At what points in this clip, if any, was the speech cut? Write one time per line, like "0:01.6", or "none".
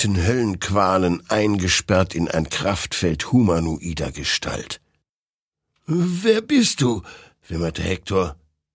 none